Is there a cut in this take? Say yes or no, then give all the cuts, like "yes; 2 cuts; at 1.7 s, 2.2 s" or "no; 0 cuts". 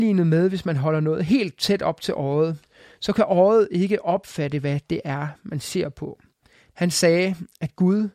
yes; 1 cut; at 6.7 s